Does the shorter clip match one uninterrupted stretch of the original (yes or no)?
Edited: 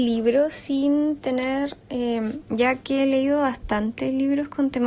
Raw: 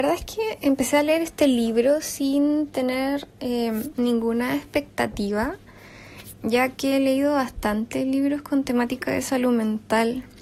no